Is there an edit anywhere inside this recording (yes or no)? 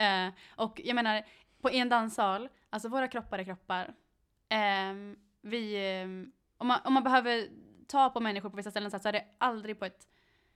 no